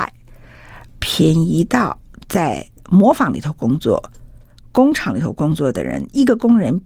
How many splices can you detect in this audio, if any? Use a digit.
1